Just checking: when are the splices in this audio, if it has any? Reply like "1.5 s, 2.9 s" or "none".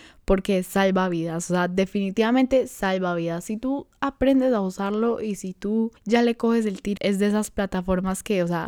6.0 s, 7.0 s